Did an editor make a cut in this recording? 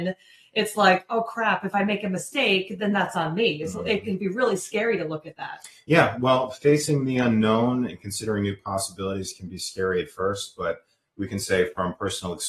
no; 0 cuts

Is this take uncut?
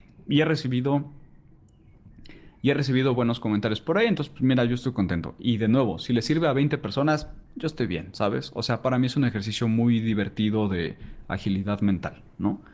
yes; 0 cuts

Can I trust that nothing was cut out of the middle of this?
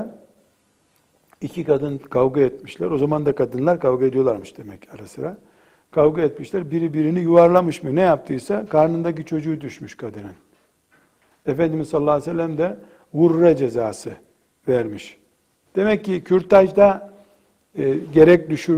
no; 1 cut; at 15.7 s

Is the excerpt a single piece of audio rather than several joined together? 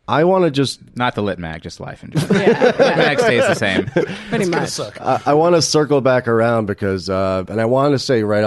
no; 1 cut; at 7.5 s

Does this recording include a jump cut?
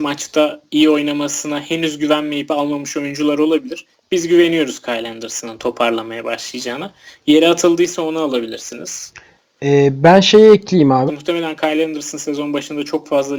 yes; 1 cut; at 11.1 s

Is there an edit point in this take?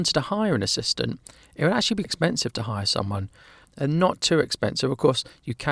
yes; 2 cuts; at 2.0 s, 3.6 s

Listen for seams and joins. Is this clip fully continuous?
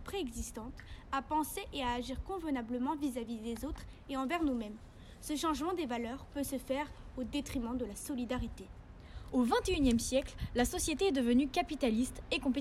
yes; 0 cuts

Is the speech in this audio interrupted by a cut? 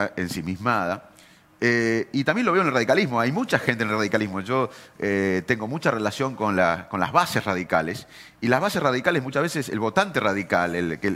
no; 0 cuts

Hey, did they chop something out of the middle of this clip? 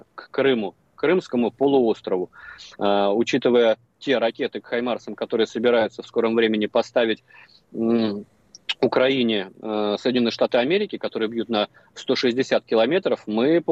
yes; 1 cut; at 2.7 s

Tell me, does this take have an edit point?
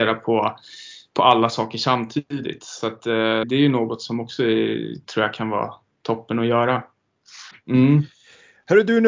yes; 2 cuts; at 3.4 s, 7.5 s

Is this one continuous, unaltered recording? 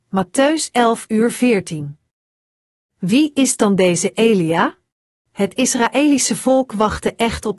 no; 1 cut; at 5.2 s

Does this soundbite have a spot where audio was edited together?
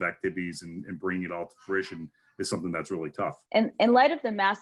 yes; 1 cut; at 3.5 s

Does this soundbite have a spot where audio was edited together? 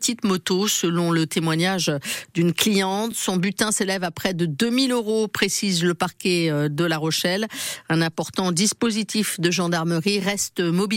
no; 0 cuts

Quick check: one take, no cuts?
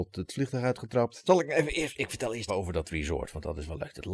no; 2 cuts; at 1.2 s, 2.5 s

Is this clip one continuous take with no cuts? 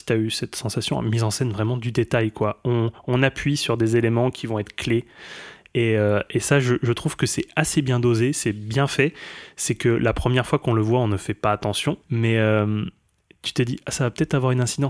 no; 1 cut; at 12.0 s

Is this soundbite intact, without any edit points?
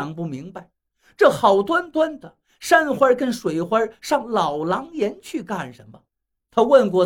yes; 0 cuts

